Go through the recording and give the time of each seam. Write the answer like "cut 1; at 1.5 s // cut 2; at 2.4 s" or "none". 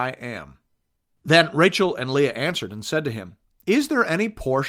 cut 1; at 1.2 s